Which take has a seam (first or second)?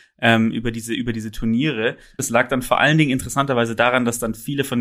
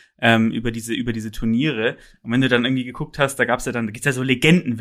first